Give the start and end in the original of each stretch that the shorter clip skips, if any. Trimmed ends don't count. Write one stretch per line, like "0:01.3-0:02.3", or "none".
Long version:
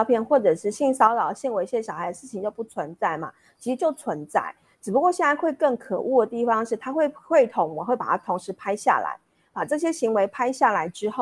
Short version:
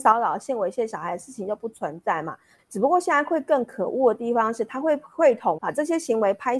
0:03.5-0:04.7
0:07.7-0:09.5